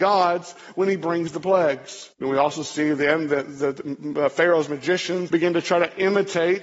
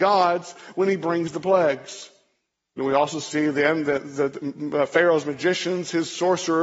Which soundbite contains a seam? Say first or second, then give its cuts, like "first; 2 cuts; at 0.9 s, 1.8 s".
first; 2 cuts; at 2.1 s, 5.3 s